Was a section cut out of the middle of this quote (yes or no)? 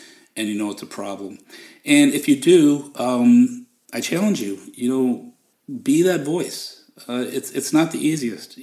no